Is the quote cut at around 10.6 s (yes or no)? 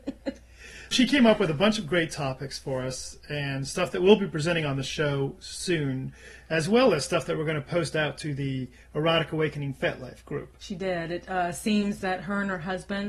yes